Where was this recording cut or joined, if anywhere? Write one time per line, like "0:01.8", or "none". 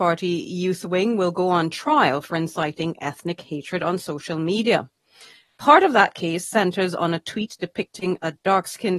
none